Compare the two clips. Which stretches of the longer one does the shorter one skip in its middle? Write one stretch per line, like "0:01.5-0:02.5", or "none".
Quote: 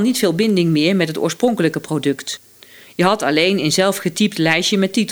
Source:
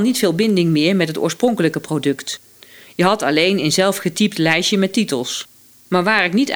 none